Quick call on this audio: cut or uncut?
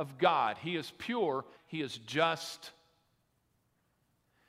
cut